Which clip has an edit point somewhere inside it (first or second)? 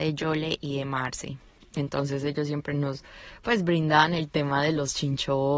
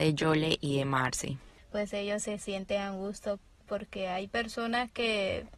second